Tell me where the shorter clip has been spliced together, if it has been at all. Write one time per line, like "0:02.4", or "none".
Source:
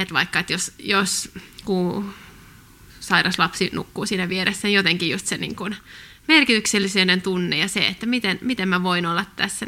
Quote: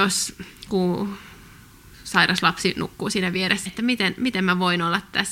0:03.7